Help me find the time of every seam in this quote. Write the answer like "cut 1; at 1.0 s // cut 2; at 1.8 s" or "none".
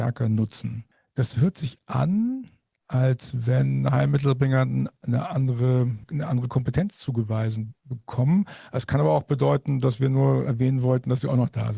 none